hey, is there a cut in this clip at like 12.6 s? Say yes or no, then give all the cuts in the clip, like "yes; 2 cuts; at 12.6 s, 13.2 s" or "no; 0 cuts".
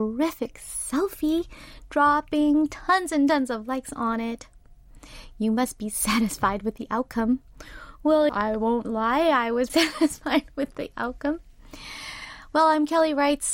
no; 2 cuts; at 8.3 s, 9.7 s